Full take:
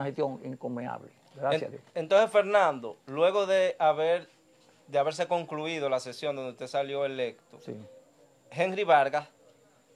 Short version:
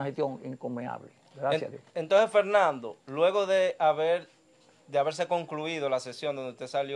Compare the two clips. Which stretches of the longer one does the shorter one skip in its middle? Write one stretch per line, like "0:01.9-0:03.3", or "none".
none